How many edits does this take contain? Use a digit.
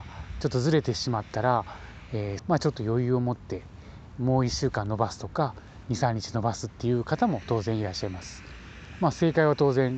1